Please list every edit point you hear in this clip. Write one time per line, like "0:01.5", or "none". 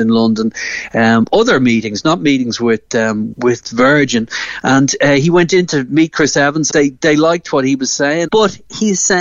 0:03.3
0:06.7
0:08.3